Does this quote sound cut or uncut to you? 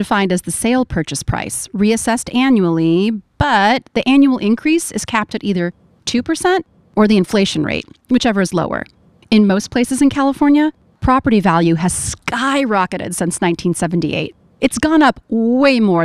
uncut